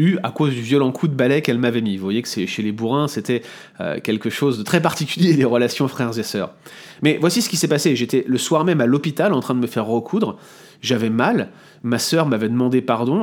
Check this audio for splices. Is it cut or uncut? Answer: uncut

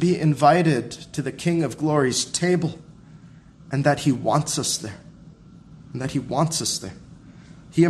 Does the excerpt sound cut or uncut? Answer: uncut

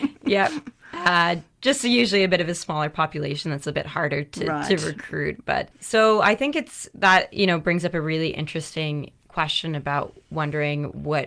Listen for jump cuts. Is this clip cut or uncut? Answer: uncut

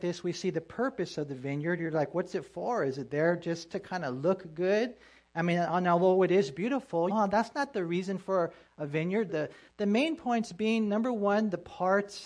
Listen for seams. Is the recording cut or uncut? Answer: cut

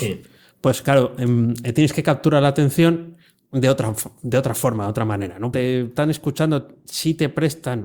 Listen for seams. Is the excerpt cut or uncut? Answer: cut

